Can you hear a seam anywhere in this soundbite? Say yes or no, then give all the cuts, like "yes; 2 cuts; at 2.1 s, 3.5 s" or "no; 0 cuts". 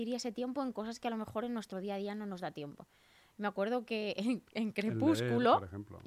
no; 0 cuts